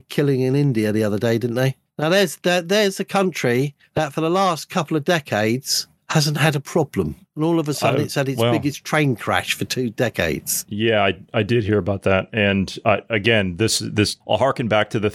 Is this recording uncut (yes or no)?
yes